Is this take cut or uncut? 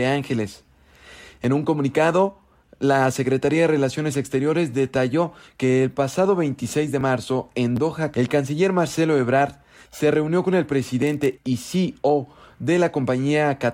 cut